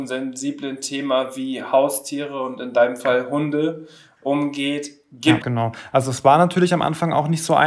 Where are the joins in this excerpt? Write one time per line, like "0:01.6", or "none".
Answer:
0:05.4